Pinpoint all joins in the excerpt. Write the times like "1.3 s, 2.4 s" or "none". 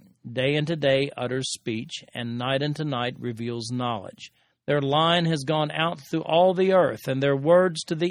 4.5 s